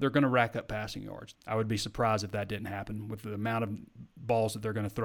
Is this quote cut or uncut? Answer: cut